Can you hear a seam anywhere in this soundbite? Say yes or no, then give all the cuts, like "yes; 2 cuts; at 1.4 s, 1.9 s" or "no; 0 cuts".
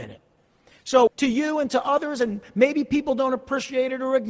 yes; 1 cut; at 1.1 s